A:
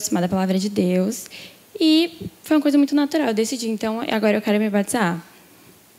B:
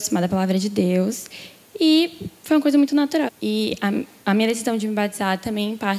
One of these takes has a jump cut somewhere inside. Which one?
B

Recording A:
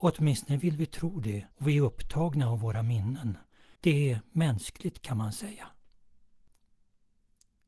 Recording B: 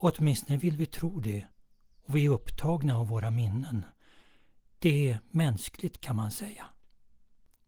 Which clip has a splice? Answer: A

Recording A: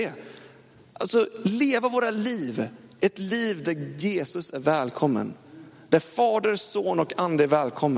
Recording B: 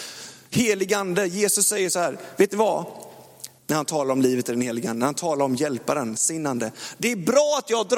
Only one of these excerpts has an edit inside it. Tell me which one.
B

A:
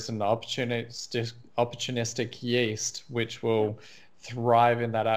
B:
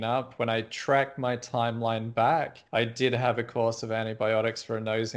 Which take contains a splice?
B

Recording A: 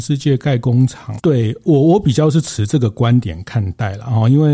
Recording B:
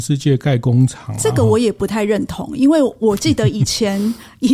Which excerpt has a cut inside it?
A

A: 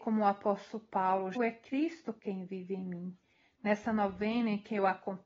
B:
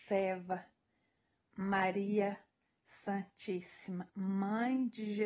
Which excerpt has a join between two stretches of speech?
A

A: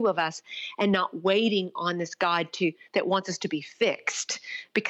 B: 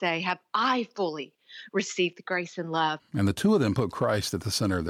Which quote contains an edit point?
B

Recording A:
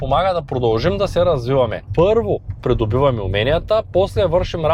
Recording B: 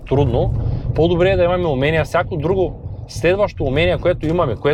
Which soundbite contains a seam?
A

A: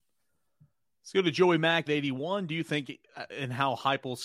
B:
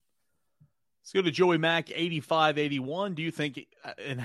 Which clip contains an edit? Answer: A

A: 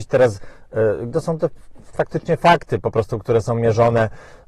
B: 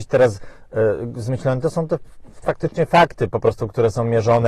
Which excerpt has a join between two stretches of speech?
A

